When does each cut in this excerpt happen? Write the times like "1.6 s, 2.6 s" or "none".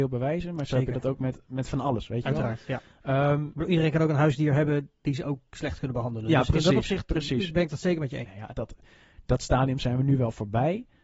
8.2 s